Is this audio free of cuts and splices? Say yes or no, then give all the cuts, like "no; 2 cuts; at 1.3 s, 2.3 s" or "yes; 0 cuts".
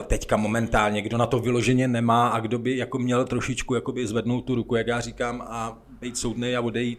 yes; 0 cuts